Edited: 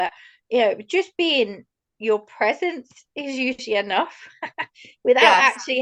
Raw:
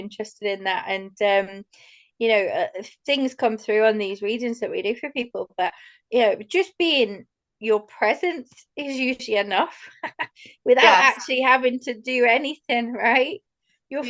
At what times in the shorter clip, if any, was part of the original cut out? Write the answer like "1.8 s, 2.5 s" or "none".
none